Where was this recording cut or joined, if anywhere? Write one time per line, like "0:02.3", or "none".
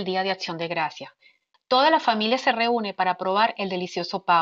0:01.5